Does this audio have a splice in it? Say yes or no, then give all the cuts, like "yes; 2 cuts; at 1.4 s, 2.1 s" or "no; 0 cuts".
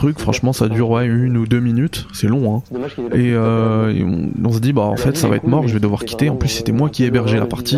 no; 0 cuts